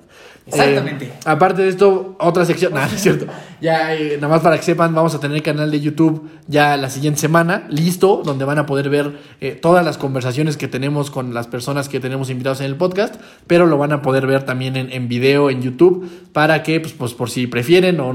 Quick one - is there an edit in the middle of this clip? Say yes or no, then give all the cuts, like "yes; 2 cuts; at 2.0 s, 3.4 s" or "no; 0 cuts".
no; 0 cuts